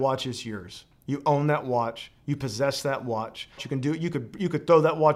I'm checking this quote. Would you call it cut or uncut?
cut